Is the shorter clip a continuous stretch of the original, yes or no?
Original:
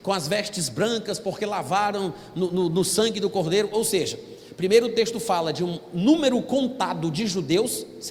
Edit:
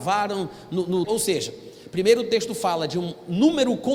no